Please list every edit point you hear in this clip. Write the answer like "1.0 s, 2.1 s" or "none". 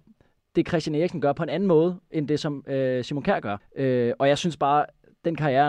3.6 s